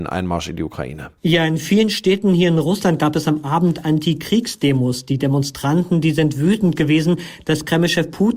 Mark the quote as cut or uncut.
cut